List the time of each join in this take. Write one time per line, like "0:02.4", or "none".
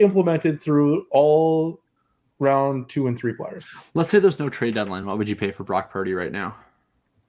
none